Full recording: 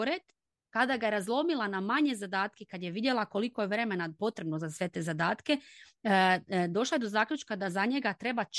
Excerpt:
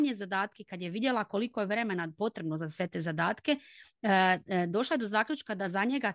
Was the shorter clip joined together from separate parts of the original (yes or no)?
no